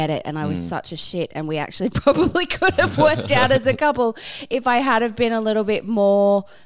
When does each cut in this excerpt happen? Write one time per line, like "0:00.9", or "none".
none

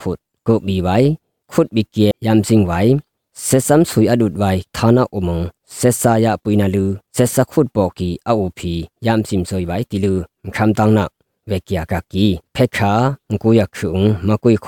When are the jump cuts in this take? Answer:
0:02.1
0:07.1
0:12.5

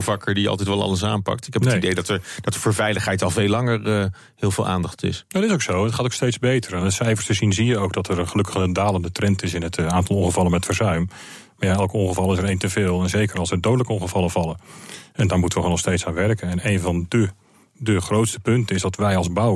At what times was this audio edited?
none

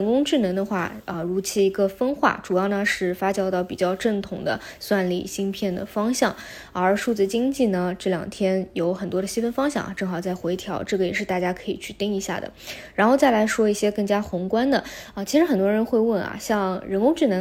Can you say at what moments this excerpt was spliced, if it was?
none

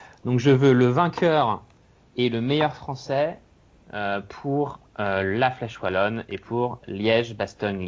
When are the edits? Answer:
none

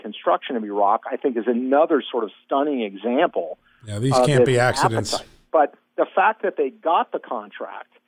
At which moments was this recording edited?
0:05.5

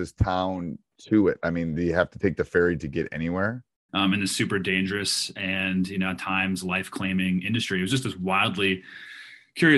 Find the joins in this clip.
0:03.9

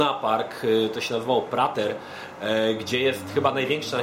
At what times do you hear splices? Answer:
none

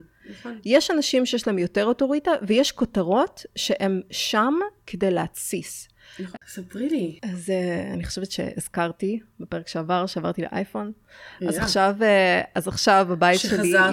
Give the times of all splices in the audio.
0:06.3

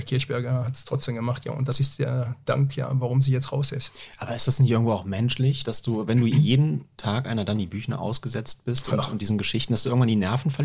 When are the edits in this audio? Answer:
none

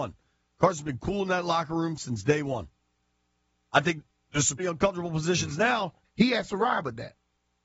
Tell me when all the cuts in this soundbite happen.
0:04.6
0:06.0

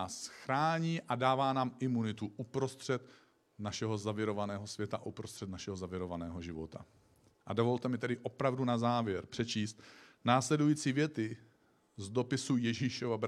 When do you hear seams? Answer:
none

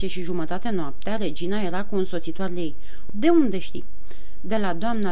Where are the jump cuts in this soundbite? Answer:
0:03.1

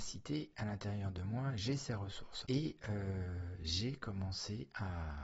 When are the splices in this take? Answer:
0:02.4

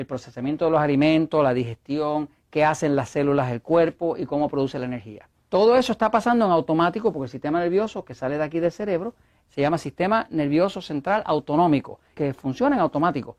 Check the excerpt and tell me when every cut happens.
0:05.4
0:12.1

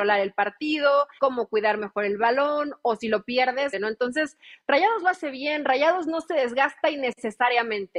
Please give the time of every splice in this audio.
0:01.2
0:03.7

